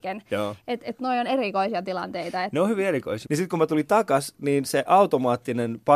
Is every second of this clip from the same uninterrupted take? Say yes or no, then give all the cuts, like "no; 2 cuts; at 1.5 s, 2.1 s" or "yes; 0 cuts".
no; 1 cut; at 3.3 s